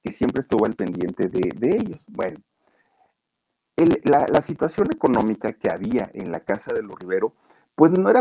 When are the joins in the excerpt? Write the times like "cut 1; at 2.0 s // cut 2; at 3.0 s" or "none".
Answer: none